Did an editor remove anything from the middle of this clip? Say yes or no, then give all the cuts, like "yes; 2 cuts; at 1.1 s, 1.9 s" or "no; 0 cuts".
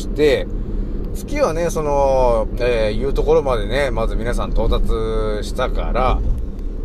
yes; 2 cuts; at 1.1 s, 2.5 s